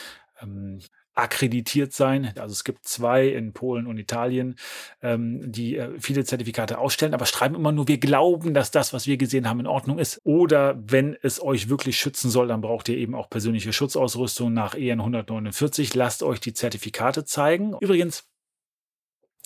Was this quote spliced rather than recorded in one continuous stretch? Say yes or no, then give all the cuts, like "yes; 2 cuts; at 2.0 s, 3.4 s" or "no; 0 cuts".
yes; 3 cuts; at 2.4 s, 10.2 s, 17.8 s